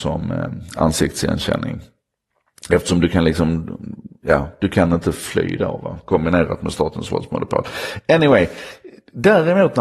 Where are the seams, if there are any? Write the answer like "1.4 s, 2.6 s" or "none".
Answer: none